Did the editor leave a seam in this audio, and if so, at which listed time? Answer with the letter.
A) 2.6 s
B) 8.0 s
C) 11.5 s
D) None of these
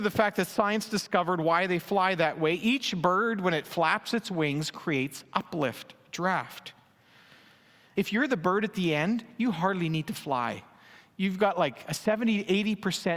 B